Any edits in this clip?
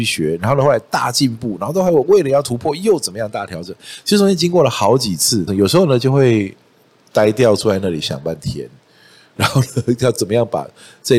yes; 1 cut; at 5.5 s

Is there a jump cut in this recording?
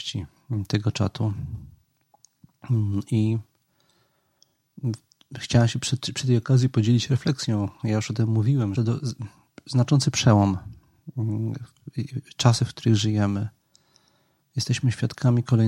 yes; 1 cut; at 8.8 s

